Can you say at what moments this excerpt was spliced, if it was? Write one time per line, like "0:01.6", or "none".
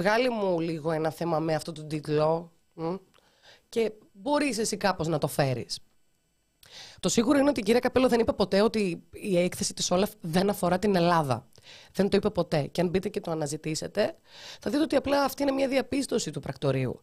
none